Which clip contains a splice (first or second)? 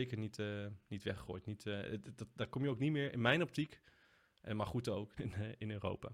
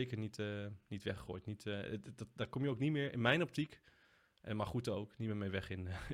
first